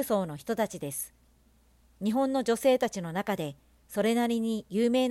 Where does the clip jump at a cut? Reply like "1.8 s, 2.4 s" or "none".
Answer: none